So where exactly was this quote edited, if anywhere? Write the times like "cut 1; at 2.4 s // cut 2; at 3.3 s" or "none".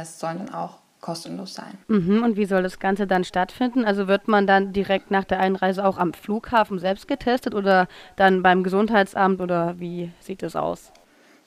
cut 1; at 1.8 s